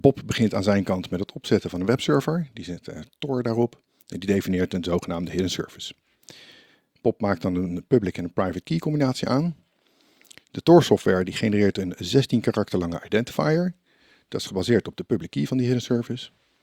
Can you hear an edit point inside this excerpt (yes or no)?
no